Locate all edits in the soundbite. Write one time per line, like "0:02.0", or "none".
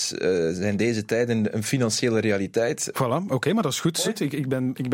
0:01.5
0:02.9
0:04.0